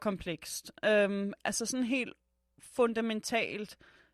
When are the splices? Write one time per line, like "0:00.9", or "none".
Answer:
none